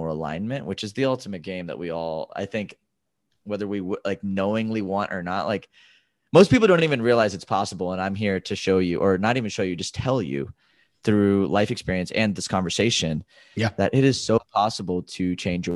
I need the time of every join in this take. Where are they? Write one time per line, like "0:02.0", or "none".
none